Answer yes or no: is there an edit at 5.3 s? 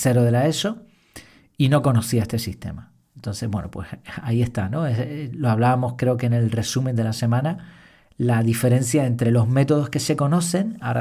no